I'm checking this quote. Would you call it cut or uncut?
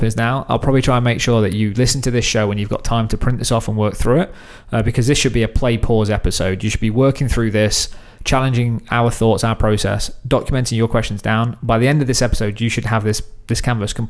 uncut